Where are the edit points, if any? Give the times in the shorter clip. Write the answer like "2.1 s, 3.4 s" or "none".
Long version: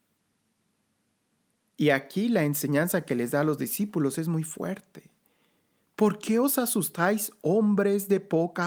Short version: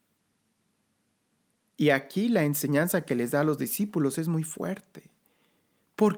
none